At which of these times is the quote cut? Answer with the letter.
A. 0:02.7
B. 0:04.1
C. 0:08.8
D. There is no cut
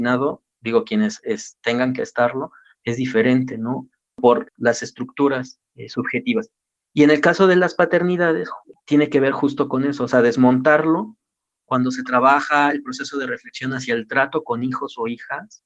D